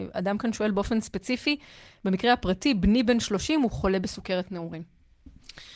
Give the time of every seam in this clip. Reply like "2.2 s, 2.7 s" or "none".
none

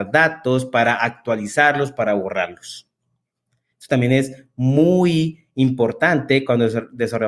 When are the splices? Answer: 3.7 s

